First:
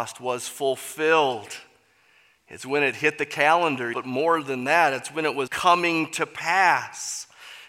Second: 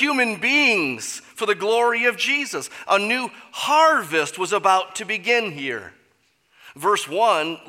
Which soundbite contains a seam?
first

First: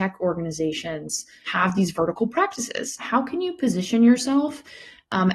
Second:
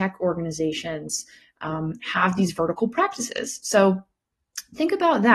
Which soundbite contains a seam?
first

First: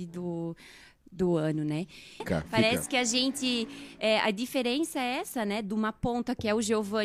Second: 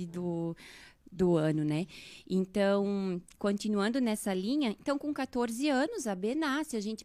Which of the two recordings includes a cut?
first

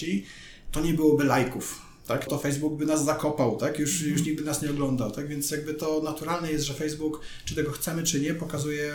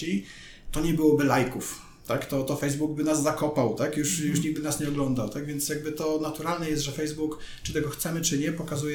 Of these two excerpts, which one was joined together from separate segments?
first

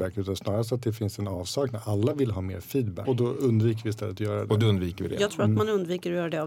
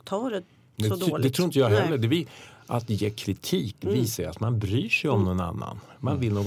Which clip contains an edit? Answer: first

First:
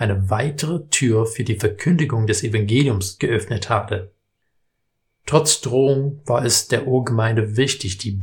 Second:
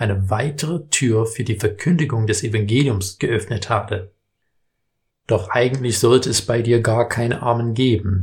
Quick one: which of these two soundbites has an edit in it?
second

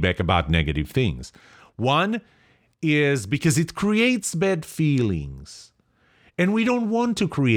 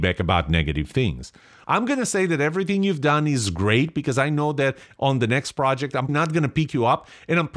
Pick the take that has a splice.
second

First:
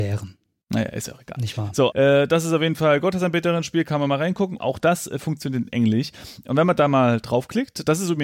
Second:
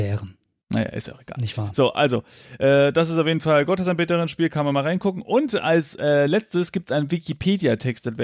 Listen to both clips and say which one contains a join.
first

